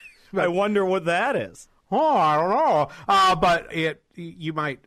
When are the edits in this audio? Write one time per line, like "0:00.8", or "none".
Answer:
0:03.7